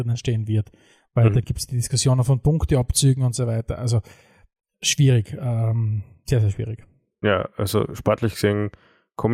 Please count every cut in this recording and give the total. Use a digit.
0